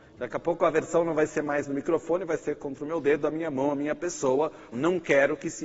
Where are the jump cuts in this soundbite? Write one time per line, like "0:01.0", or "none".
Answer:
0:04.7